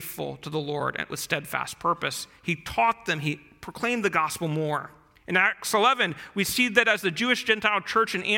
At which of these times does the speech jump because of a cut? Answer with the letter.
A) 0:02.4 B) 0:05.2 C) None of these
B